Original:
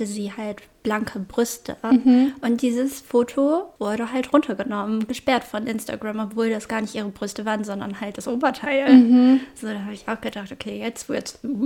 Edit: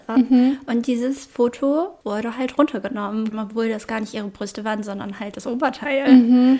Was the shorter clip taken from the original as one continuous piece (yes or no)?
no